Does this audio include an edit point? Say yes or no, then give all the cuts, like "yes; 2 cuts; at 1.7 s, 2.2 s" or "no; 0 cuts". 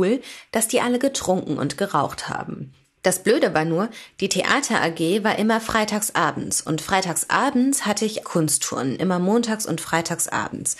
yes; 1 cut; at 8.2 s